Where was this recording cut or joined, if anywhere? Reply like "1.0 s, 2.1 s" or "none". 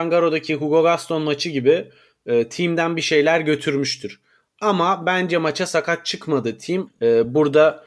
6.9 s